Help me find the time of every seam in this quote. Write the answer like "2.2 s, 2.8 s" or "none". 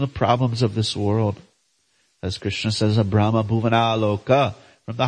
none